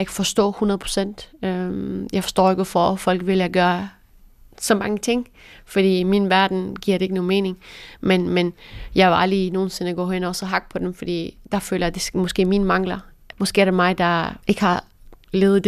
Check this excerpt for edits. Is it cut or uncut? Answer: cut